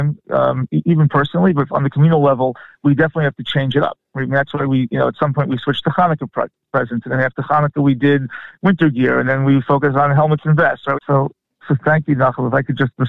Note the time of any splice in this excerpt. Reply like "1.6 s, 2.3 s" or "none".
10.9 s